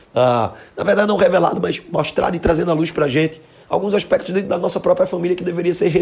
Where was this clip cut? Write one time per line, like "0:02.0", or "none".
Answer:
none